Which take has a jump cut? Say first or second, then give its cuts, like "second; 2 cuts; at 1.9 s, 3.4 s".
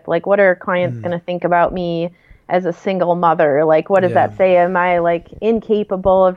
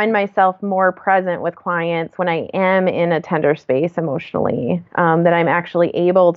second; 1 cut; at 4.9 s